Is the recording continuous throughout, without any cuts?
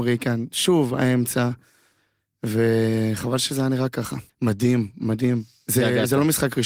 no; 1 cut; at 4.3 s

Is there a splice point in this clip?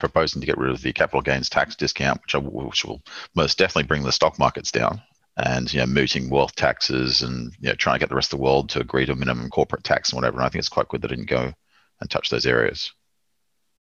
no; 0 cuts

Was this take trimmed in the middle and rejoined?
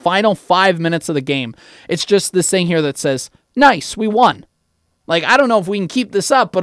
no; 0 cuts

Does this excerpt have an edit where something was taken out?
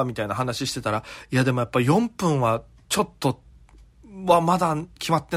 no; 0 cuts

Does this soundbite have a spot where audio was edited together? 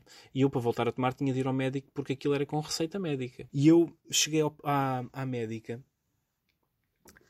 yes; 1 cut; at 3.5 s

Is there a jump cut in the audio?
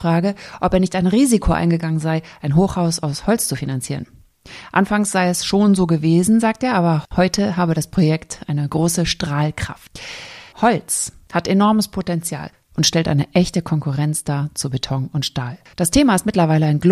no; 0 cuts

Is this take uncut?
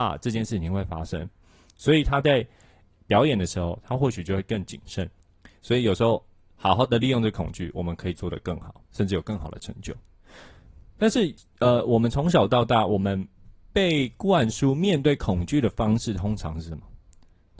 yes; 0 cuts

